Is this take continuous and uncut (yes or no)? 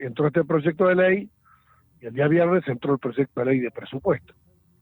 yes